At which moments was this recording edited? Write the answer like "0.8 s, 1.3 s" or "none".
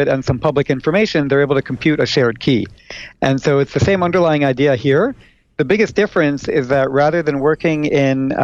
none